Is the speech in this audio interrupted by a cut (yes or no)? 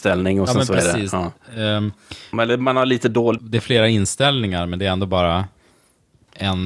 yes